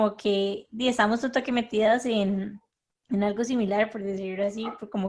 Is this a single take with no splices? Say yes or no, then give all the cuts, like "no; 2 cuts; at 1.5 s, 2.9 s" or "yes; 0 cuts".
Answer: yes; 0 cuts